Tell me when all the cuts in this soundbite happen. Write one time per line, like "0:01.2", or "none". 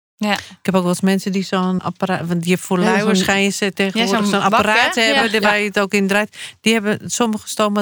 0:01.8